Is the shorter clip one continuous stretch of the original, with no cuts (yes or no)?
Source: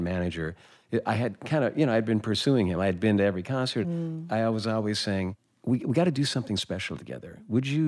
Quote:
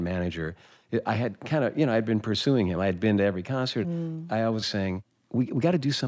no